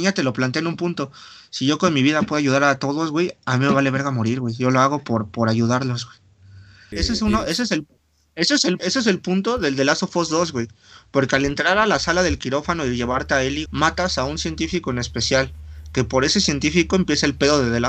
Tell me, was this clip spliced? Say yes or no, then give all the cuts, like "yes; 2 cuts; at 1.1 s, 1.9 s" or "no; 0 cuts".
yes; 3 cuts; at 6.9 s, 8.8 s, 13.7 s